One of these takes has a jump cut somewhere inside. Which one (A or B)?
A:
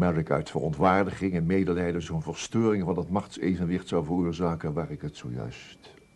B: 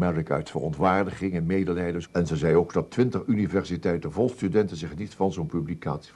B